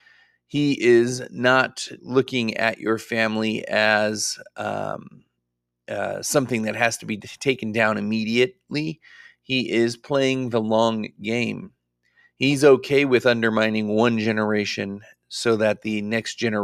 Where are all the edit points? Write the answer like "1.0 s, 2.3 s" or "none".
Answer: 2.0 s